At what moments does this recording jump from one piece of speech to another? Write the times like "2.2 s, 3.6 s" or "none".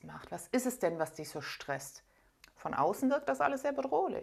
2.4 s

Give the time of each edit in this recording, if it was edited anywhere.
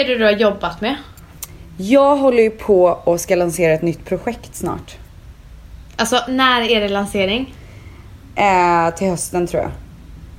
none

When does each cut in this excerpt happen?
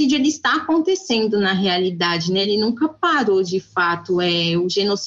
none

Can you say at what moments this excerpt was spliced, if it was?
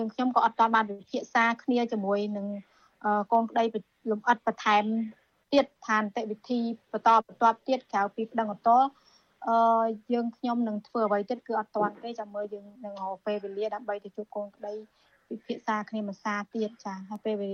12.7 s

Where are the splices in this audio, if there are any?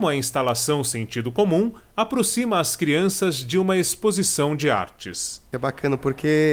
none

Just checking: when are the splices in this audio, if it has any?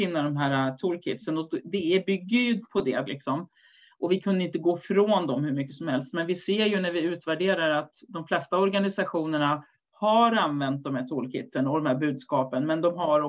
3.1 s

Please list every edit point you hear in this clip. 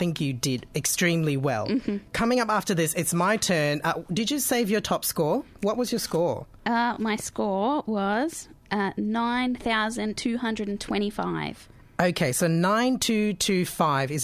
none

